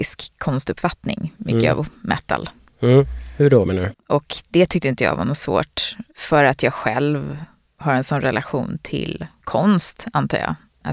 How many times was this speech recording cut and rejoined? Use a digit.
1